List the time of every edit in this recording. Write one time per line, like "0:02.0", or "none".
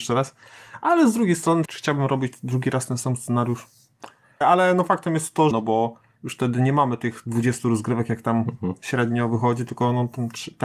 0:01.6
0:04.4
0:05.5